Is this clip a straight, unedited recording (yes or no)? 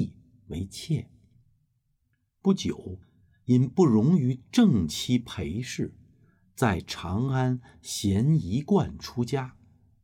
yes